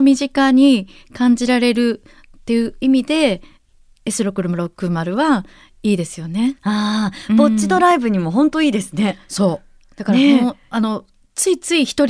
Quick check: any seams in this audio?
no; 0 cuts

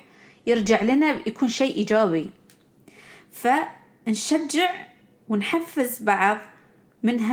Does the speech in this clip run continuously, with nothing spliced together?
yes; 0 cuts

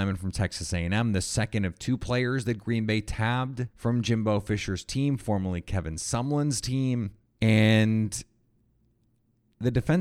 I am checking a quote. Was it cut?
yes; 2 cuts; at 3.7 s, 7.4 s

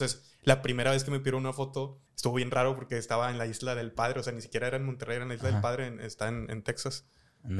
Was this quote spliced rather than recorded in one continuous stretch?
yes; 1 cut; at 2.1 s

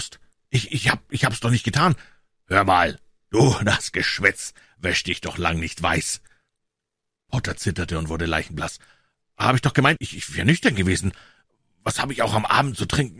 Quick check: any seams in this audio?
yes; 1 cut; at 10.0 s

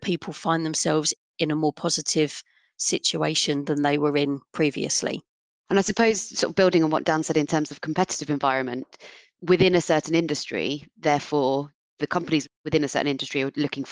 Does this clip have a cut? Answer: no; 0 cuts

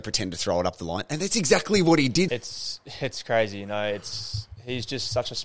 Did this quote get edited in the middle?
yes; 1 cut; at 2.3 s

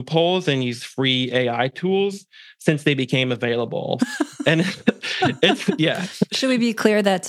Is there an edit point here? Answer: yes; 1 cut; at 4.0 s

